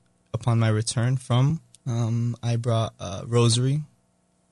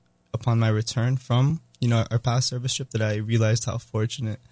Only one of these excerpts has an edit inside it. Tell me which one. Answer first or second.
first